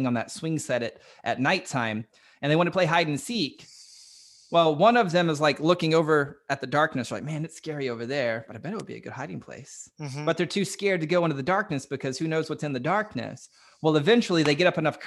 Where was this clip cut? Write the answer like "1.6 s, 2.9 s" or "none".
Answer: none